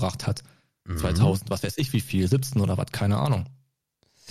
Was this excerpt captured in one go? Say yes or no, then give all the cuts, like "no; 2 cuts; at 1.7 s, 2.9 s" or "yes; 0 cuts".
yes; 0 cuts